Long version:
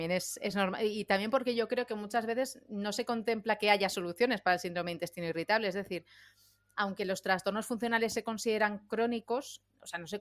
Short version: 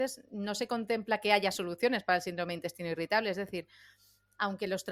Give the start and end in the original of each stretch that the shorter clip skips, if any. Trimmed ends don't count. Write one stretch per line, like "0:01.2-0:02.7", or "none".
none